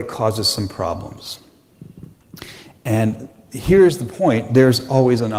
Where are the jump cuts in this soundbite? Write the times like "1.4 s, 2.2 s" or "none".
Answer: none